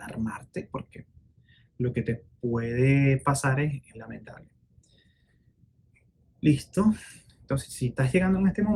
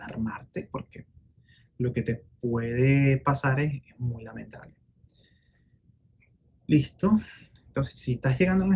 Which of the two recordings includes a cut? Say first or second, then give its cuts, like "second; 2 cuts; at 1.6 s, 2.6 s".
first; 1 cut; at 3.9 s